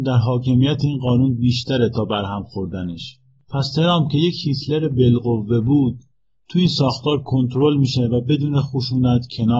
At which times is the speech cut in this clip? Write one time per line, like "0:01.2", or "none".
none

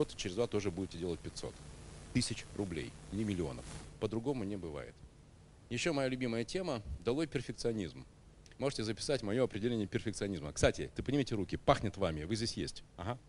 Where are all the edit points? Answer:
0:11.0

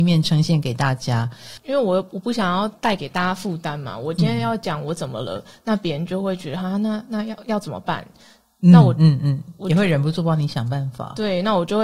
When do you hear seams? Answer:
none

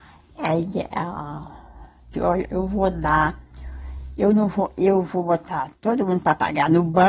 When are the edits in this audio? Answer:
0:02.1

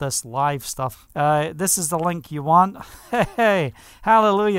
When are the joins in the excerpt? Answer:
0:00.9

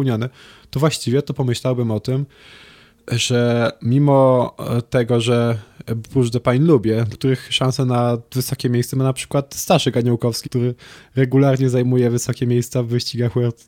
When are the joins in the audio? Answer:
0:07.1
0:10.4

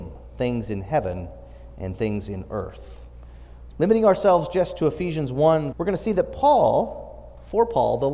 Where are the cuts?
0:03.7
0:05.7

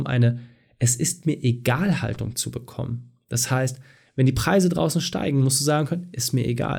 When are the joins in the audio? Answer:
none

